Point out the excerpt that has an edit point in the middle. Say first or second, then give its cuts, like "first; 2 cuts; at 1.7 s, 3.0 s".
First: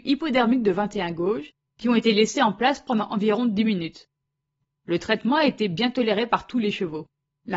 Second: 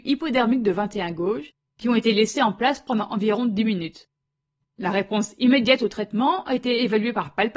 second; 1 cut; at 4.7 s